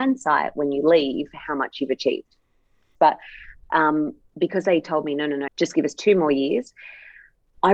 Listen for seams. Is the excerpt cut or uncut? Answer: cut